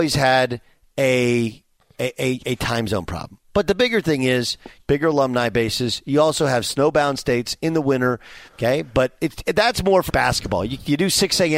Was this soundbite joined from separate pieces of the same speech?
yes; 3 cuts; at 4.8 s, 8.5 s, 10.1 s

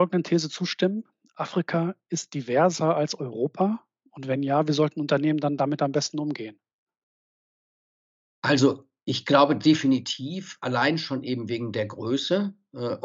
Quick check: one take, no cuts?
yes; 0 cuts

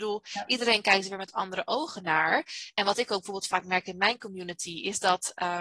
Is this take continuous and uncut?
yes; 0 cuts

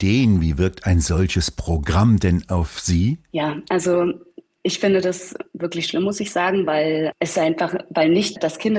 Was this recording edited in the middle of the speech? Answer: no; 0 cuts

